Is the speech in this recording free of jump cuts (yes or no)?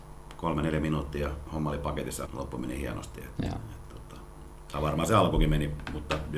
no